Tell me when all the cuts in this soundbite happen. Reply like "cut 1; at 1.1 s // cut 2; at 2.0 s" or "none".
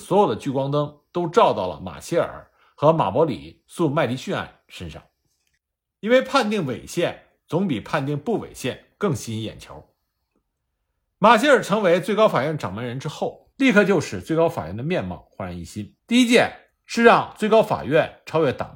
cut 1; at 13.5 s // cut 2; at 16.0 s